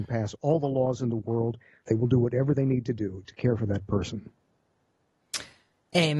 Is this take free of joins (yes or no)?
no